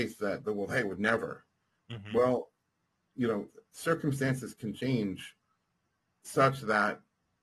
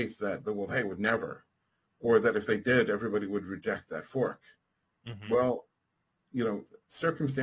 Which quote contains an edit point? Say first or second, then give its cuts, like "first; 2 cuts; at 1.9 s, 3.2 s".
first; 1 cut; at 1.8 s